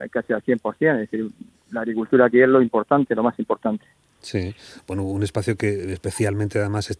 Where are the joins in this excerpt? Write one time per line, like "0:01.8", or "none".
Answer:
none